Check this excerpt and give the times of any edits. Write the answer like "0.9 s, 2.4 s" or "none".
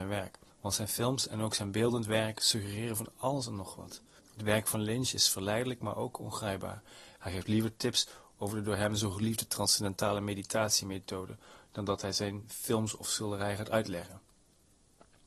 4.2 s, 7.2 s